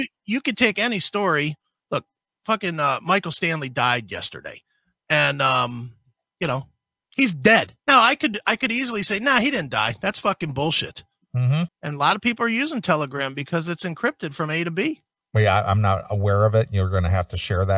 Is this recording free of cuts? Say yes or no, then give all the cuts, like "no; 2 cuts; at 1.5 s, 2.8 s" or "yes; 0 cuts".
no; 2 cuts; at 7.8 s, 11.7 s